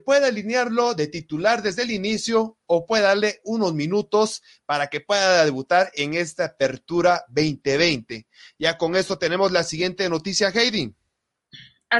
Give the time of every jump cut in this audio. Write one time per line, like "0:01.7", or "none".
none